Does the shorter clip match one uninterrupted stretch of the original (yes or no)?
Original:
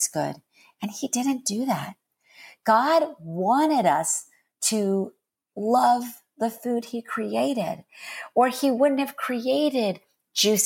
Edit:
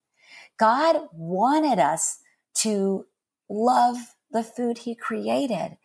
yes